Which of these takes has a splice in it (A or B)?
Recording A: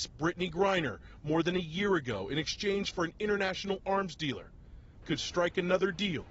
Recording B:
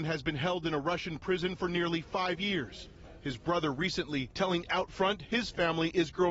A